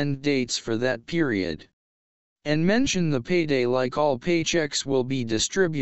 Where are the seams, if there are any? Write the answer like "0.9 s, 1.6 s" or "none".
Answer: none